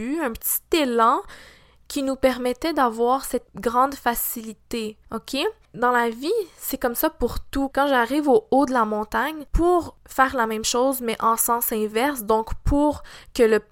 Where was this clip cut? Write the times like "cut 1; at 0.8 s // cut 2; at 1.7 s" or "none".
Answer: cut 1; at 7.7 s

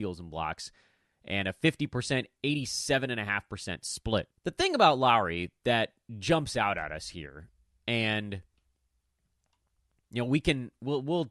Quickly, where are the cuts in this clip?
cut 1; at 4.3 s

